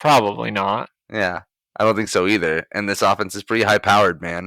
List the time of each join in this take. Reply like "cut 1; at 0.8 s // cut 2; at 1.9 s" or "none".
none